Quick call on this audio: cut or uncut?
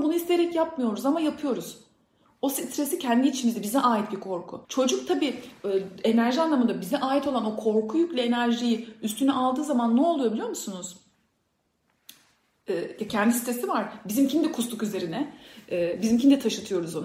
cut